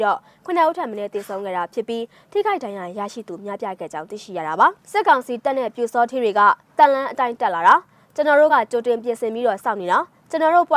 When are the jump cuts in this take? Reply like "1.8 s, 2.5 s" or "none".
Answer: none